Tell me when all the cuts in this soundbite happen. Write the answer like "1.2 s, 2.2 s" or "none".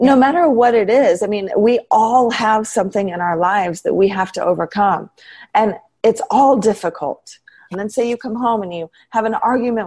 7.7 s